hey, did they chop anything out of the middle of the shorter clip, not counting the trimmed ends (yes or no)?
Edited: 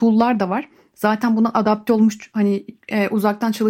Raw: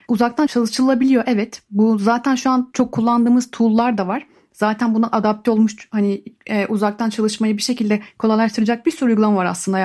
no